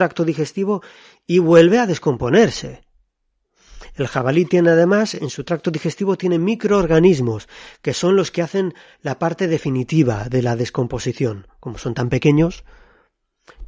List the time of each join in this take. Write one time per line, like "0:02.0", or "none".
none